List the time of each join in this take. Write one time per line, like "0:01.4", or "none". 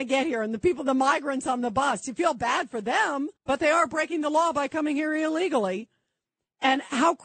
0:03.4